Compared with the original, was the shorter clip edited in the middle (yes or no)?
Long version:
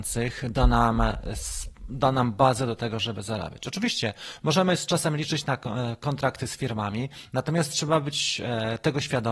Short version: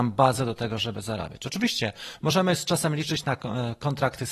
no